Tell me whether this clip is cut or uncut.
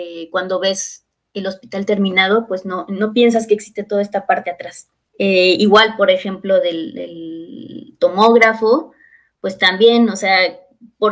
uncut